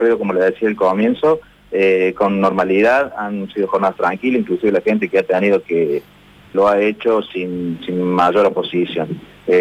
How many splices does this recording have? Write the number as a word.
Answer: one